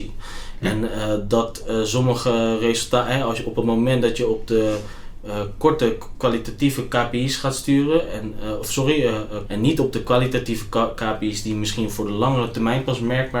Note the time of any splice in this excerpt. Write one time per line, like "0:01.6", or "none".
0:09.5